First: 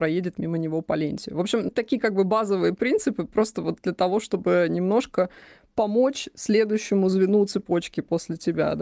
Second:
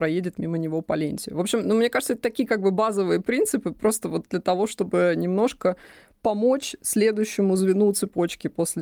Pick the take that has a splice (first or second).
first